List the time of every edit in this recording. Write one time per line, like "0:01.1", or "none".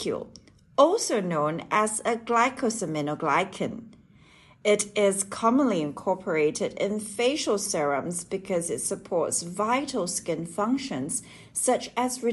none